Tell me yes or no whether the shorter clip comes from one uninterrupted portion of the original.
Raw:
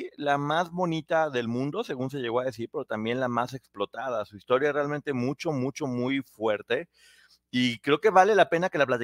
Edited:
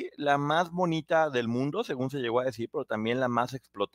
yes